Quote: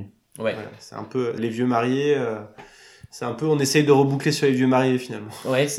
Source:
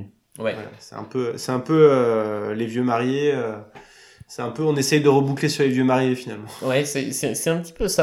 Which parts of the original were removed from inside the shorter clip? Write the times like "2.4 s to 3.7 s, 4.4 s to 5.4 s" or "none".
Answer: 1.4 s to 2.5 s